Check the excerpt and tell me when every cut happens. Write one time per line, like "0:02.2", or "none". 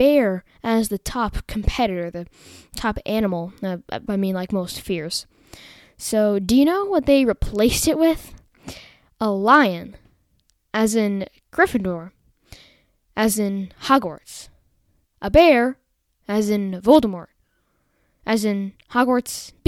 0:04.1